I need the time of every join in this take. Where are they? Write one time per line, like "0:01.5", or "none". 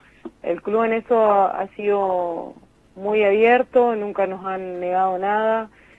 none